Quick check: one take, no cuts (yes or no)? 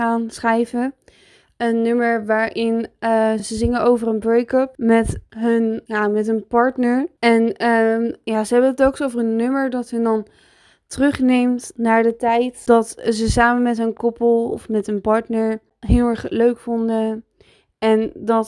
yes